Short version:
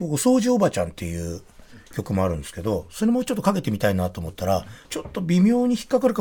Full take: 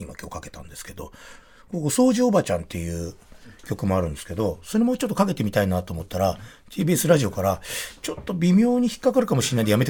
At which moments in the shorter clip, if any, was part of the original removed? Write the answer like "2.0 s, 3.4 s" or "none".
4.8 s